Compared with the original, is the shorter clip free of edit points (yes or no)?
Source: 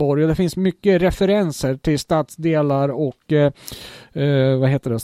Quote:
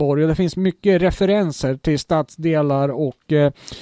yes